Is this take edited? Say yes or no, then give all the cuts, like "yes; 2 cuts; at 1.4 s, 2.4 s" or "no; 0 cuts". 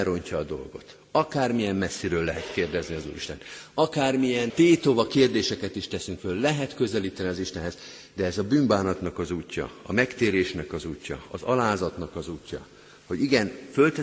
yes; 1 cut; at 4.5 s